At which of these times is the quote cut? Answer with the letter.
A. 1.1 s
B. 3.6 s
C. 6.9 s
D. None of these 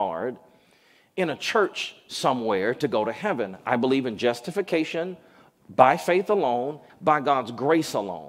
C